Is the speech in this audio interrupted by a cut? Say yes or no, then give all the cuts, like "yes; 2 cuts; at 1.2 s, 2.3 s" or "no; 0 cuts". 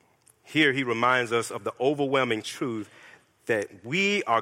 no; 0 cuts